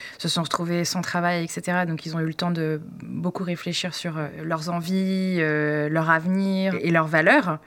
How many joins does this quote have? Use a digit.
0